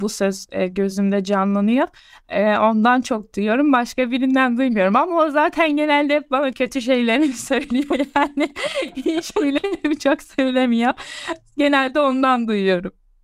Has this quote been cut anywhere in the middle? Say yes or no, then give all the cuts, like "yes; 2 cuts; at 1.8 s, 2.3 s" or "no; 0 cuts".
no; 0 cuts